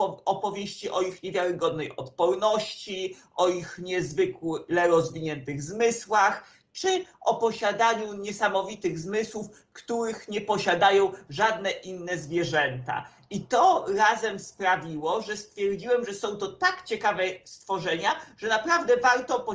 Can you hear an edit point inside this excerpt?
no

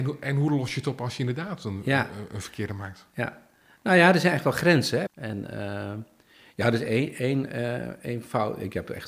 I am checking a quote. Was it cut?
yes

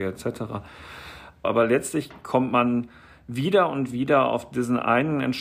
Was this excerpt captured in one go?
no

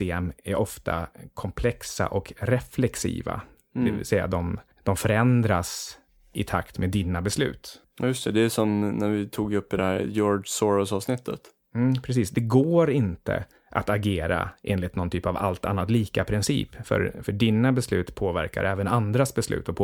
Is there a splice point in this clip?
no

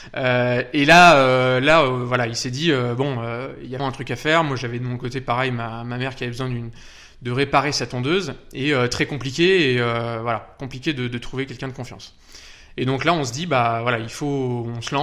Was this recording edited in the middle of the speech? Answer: yes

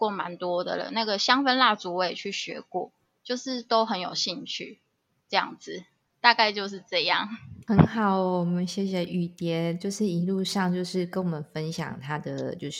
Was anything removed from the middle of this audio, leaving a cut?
no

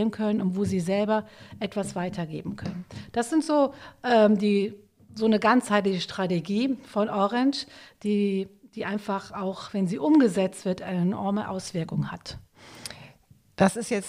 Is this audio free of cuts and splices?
yes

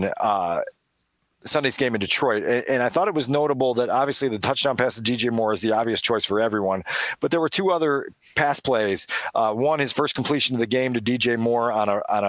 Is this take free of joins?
yes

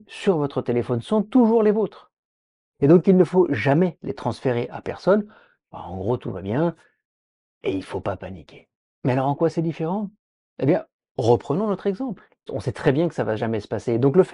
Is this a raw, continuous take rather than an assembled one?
no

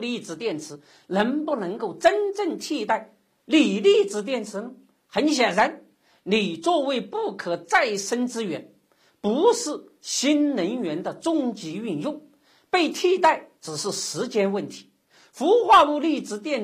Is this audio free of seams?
yes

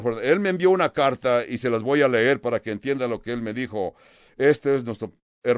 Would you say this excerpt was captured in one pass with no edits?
yes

